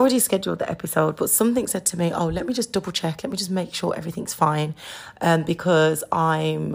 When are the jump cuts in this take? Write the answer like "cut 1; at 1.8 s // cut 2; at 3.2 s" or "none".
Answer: none